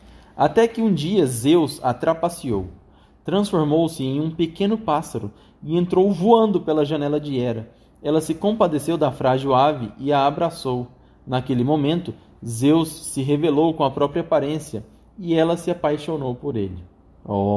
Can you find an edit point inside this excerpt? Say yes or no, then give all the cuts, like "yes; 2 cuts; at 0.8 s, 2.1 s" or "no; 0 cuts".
no; 0 cuts